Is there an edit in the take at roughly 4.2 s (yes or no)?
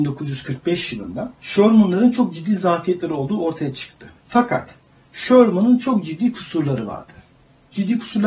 yes